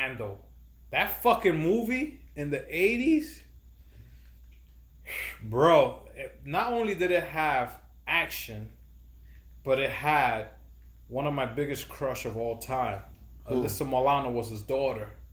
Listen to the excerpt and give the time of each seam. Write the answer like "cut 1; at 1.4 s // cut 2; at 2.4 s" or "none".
none